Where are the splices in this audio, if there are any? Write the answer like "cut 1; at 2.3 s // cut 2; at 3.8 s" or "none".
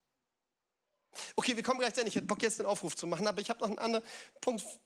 none